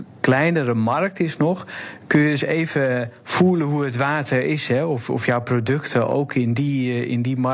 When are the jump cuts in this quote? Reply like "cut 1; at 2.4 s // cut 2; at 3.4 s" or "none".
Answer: none